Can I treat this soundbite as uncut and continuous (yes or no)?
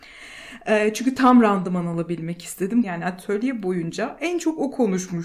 no